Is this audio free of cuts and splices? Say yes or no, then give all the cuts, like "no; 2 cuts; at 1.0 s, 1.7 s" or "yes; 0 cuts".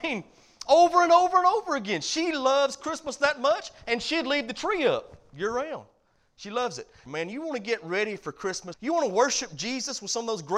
no; 2 cuts; at 7.1 s, 8.7 s